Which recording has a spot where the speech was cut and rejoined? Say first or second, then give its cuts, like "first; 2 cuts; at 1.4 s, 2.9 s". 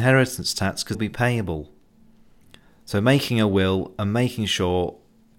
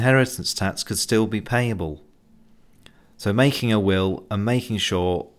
first; 1 cut; at 0.9 s